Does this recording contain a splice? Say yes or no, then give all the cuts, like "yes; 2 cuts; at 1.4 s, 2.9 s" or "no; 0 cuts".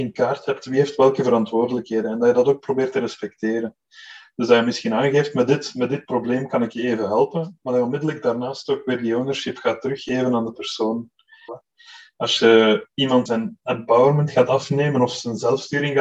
yes; 2 cuts; at 11.5 s, 13.3 s